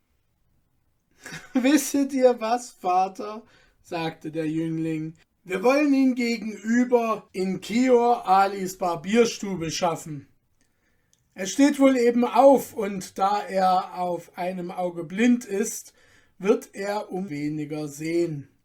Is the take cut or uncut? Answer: cut